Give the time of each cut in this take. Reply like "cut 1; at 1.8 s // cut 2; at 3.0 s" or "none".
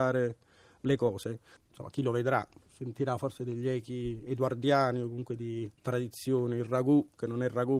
cut 1; at 1.6 s // cut 2; at 5.8 s